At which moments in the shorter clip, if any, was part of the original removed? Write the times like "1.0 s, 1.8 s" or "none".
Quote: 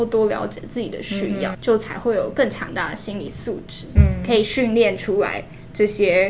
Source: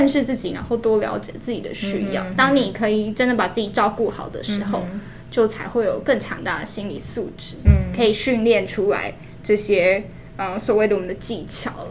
1.5 s